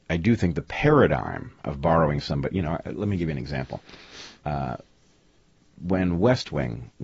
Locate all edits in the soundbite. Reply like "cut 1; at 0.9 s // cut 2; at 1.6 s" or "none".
none